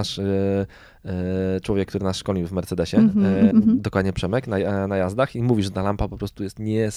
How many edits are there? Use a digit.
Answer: 1